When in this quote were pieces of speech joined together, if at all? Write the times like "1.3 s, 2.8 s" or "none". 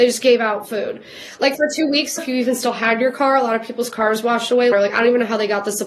2.2 s, 4.7 s